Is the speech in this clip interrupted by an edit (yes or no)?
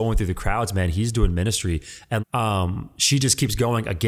yes